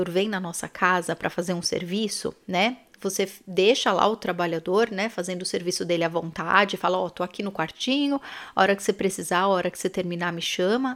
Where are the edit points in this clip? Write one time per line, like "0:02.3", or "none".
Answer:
0:02.9